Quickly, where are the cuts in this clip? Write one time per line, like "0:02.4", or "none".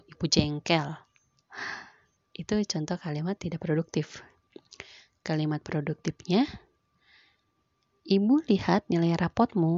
0:02.2